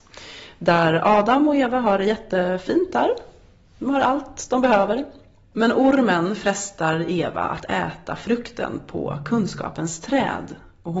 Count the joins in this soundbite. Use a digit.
0